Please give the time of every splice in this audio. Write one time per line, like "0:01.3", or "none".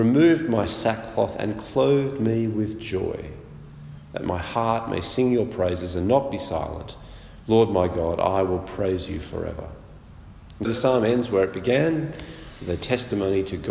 0:10.6